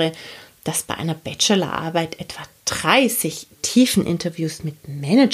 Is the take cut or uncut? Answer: uncut